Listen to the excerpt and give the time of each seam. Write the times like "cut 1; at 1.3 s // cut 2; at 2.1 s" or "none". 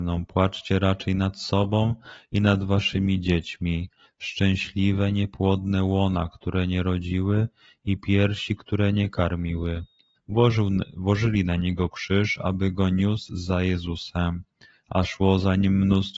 cut 1; at 4.1 s // cut 2; at 10.2 s